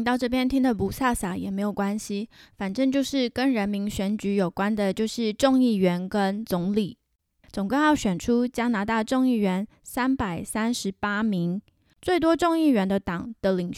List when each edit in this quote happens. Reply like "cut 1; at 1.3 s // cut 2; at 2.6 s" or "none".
cut 1; at 7.4 s

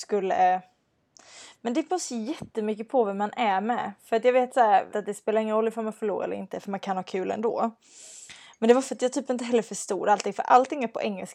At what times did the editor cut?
cut 1; at 4.9 s

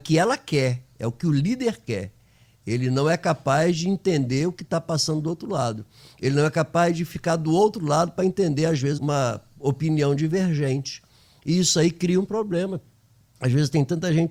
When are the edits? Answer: cut 1; at 9.0 s

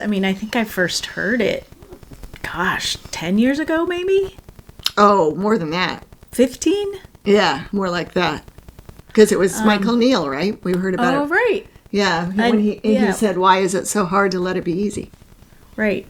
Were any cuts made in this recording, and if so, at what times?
none

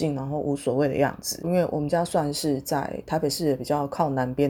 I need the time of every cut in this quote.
cut 1; at 1.4 s

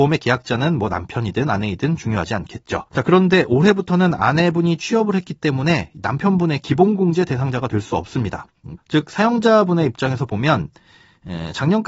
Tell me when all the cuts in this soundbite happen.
cut 1; at 2.9 s // cut 2; at 8.8 s

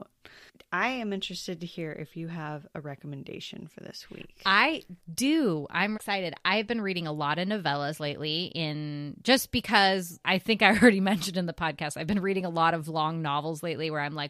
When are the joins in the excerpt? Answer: cut 1; at 6.0 s // cut 2; at 10.2 s

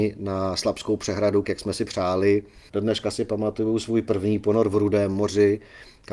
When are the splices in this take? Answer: cut 1; at 1.4 s // cut 2; at 2.7 s

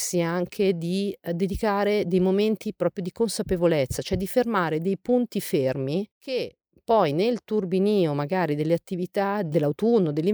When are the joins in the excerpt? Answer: none

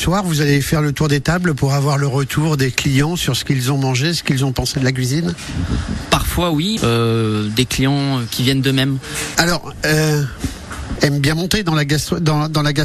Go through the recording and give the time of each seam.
cut 1; at 6.8 s // cut 2; at 9.3 s // cut 3; at 11.0 s

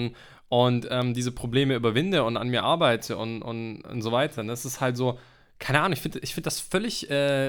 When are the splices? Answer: none

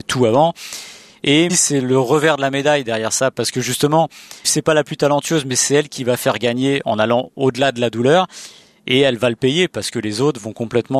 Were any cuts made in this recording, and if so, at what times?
cut 1; at 1.5 s // cut 2; at 4.4 s

